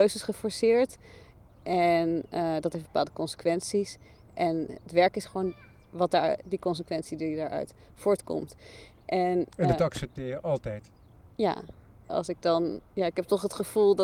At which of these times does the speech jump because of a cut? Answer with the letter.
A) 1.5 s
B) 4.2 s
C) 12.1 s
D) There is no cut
C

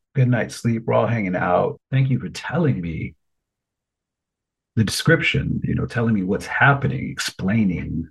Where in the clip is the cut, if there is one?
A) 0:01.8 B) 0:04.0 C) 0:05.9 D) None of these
A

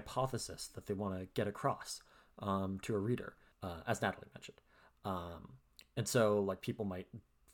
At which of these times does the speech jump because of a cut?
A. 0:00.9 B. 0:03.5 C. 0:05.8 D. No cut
B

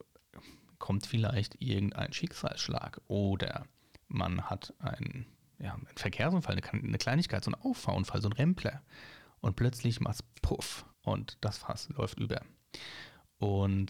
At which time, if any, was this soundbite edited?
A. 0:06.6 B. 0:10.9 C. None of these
B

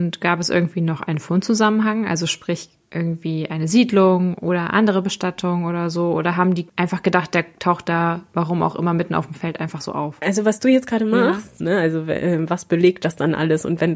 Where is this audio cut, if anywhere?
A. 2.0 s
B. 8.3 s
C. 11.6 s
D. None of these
C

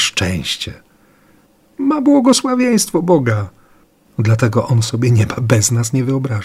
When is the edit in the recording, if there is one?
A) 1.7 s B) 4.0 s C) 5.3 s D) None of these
B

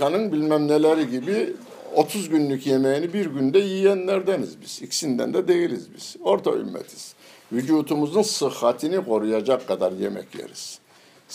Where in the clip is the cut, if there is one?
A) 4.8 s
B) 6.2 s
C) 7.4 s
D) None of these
D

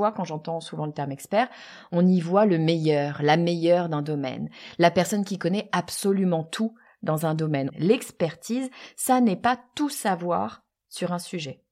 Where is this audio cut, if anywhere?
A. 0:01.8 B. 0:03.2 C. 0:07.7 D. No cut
C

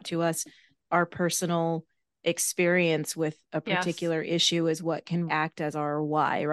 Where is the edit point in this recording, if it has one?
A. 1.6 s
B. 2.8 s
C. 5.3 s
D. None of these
C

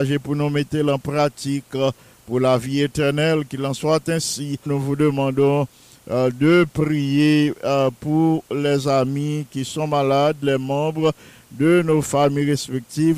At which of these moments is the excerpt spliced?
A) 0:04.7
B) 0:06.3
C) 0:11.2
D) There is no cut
A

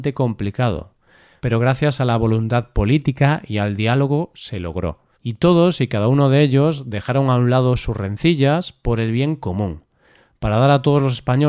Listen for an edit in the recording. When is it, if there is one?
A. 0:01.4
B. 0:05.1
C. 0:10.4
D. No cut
B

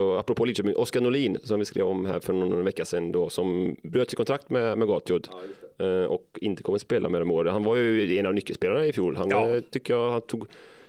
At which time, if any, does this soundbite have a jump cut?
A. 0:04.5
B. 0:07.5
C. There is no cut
C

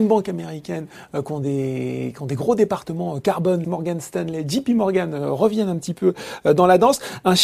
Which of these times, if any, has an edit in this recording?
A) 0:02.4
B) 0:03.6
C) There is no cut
B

